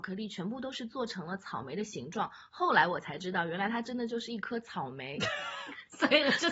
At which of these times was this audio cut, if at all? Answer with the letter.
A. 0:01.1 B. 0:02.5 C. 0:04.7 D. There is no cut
D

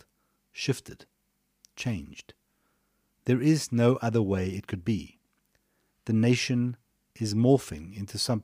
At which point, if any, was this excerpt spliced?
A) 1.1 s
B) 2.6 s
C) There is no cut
C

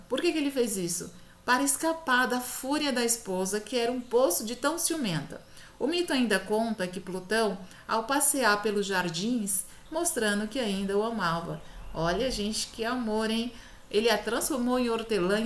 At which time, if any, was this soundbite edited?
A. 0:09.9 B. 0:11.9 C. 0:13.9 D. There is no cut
A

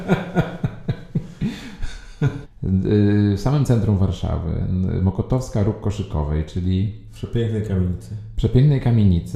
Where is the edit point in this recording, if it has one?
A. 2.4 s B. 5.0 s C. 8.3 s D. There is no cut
A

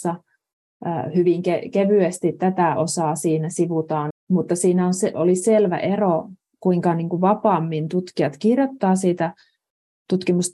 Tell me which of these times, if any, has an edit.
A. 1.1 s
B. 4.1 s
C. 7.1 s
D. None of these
B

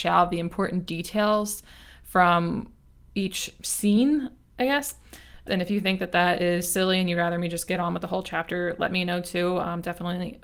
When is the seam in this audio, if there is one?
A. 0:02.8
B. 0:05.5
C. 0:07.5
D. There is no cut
B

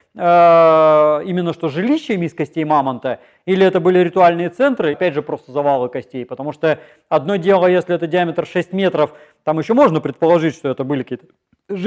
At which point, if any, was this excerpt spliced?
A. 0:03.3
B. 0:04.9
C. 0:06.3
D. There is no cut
B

